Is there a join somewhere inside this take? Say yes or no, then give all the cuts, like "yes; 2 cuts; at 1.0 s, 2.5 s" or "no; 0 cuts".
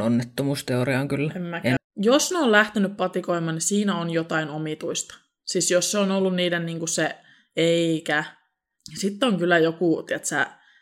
yes; 1 cut; at 1.8 s